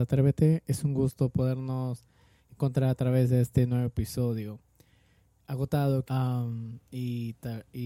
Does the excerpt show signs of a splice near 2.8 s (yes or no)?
no